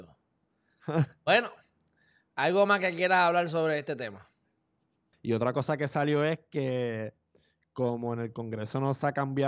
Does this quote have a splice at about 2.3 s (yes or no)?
no